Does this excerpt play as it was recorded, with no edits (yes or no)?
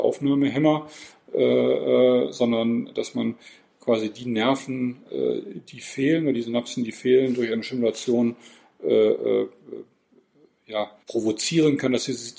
no